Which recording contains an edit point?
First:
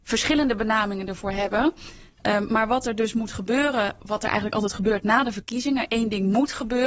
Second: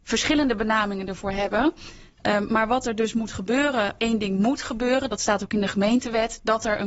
second; 1 cut; at 4.0 s

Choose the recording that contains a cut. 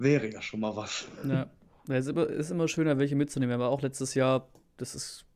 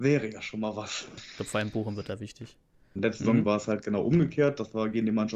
second; 2 cuts; at 1.2 s, 3.0 s

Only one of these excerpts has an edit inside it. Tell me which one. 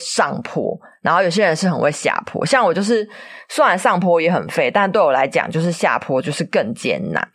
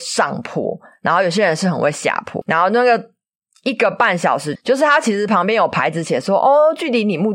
second; 2 cuts; at 2.4 s, 4.6 s

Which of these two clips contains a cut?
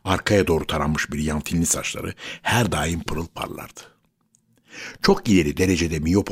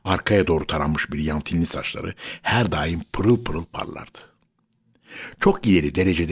first; 1 cut; at 3.1 s

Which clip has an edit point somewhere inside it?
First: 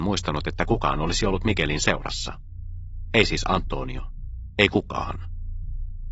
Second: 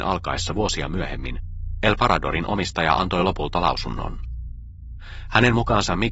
first; 1 cut; at 4.6 s

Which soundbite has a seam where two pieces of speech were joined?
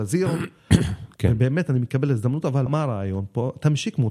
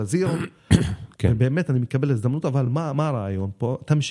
first; 1 cut; at 2.7 s

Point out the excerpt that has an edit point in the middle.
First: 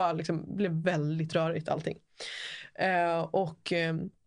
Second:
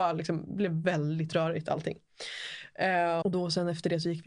second; 1 cut; at 3.2 s

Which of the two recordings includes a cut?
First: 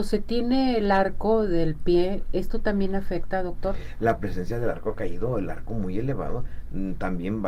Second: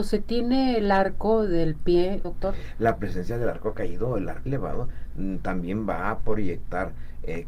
second; 2 cuts; at 2.2 s, 4.5 s

